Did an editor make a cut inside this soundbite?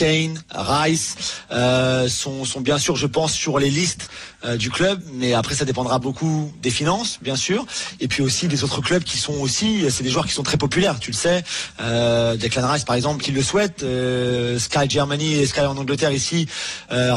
yes; 1 cut; at 13.2 s

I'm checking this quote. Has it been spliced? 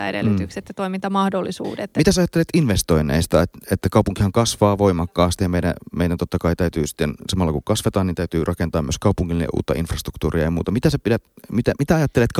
no; 0 cuts

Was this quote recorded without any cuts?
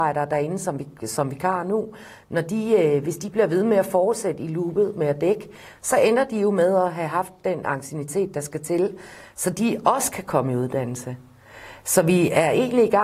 yes; 0 cuts

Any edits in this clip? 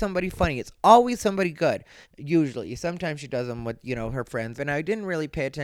yes; 2 cuts; at 2.0 s, 4.6 s

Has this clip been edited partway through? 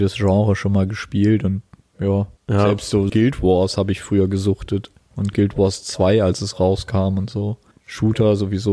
yes; 1 cut; at 3.1 s

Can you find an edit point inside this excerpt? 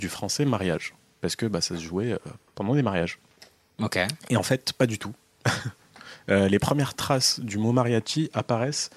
no; 0 cuts

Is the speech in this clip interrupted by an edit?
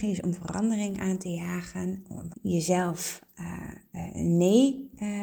yes; 1 cut; at 2.3 s

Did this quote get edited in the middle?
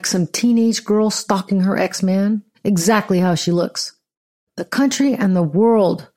yes; 1 cut; at 2.5 s

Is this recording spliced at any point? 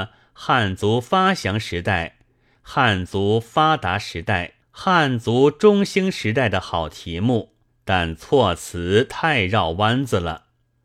yes; 2 cuts; at 4.6 s, 7.7 s

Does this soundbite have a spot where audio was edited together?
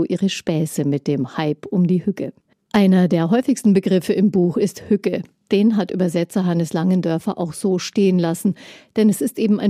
yes; 1 cut; at 2.5 s

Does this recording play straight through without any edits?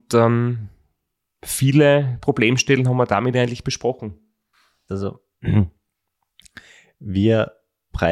no; 1 cut; at 4.9 s

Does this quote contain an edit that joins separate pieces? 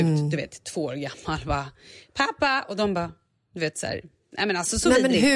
no; 0 cuts

